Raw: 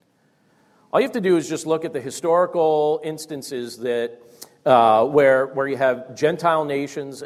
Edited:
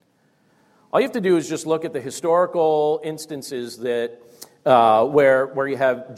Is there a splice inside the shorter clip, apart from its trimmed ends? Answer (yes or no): no